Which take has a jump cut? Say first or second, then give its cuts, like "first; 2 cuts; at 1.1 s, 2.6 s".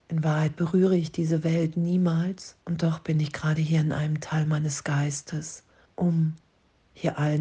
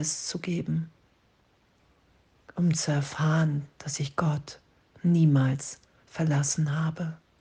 first; 2 cuts; at 2.6 s, 5.8 s